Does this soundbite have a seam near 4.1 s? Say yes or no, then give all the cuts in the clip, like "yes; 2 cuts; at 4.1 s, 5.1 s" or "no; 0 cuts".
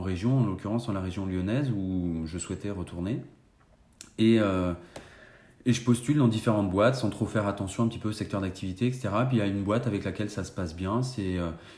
no; 0 cuts